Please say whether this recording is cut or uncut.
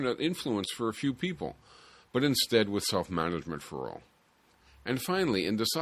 uncut